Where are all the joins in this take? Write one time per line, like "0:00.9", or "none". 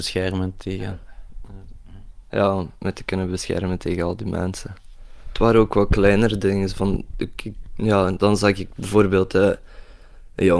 none